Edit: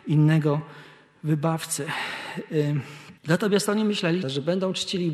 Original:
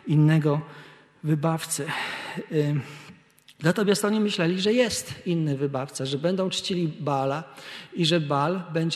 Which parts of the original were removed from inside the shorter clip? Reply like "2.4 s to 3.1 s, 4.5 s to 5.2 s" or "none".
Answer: 3.2 s to 3.5 s, 4.6 s to 6.0 s